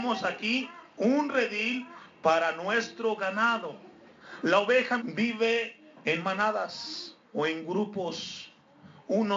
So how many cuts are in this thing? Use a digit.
2